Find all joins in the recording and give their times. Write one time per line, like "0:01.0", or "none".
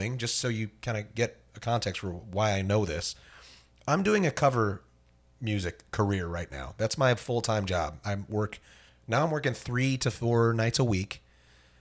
none